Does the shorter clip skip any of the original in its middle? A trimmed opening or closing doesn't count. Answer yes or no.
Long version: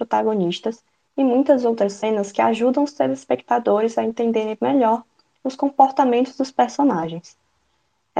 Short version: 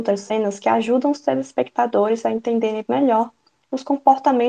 no